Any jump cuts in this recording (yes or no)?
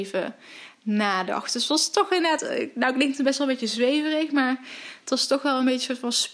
no